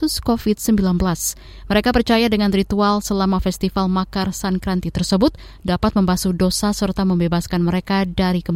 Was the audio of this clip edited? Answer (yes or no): no